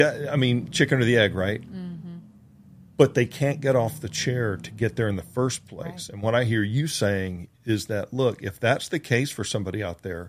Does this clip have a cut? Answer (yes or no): no